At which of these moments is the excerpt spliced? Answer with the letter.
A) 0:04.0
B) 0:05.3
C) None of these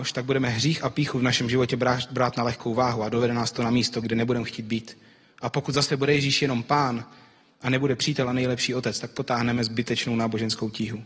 A